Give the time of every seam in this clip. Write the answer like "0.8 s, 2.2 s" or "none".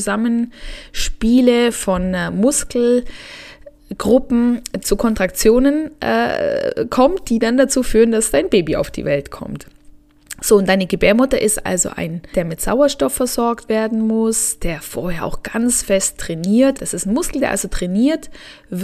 12.3 s, 16.8 s